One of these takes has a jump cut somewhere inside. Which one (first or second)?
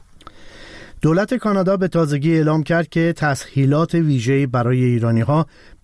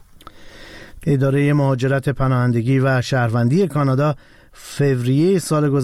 second